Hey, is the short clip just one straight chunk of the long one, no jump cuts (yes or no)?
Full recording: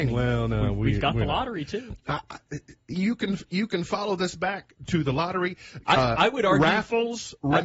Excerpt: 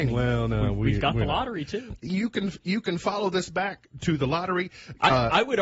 no